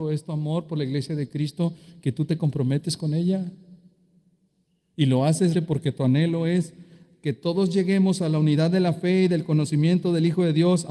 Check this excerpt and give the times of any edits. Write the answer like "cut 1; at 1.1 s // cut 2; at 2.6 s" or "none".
cut 1; at 5.5 s